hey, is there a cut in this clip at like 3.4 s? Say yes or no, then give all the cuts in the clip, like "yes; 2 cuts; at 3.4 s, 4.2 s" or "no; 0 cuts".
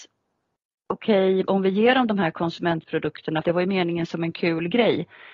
yes; 2 cuts; at 1.4 s, 3.4 s